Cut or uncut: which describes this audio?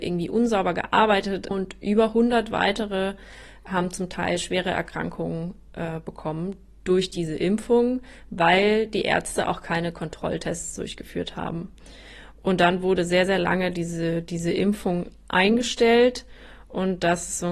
cut